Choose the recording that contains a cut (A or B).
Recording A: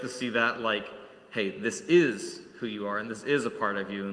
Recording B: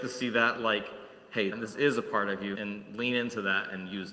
B